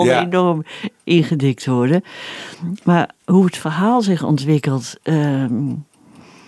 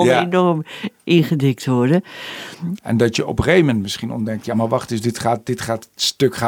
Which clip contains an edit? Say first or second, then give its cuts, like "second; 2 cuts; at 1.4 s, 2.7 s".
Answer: second; 1 cut; at 2.8 s